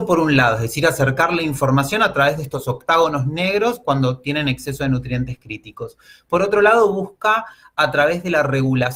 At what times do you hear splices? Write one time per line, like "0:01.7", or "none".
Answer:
none